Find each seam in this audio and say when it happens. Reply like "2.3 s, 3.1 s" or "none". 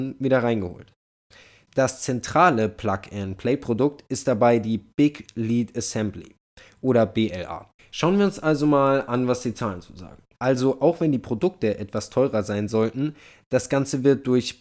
7.8 s, 10.3 s